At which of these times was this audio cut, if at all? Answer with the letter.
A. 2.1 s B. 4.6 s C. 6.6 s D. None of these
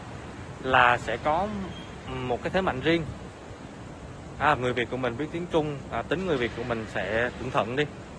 B